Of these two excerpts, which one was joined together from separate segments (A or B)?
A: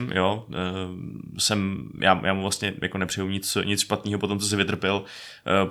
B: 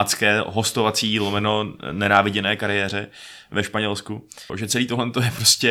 B